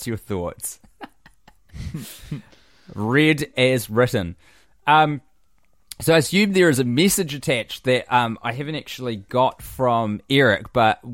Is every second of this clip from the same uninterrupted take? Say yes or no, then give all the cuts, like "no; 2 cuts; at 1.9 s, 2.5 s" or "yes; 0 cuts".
yes; 0 cuts